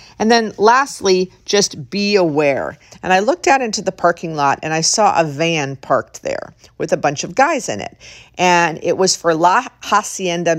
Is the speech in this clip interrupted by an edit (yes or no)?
yes